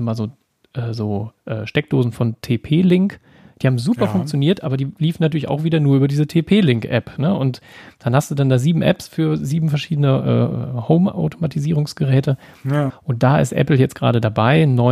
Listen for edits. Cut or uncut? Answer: cut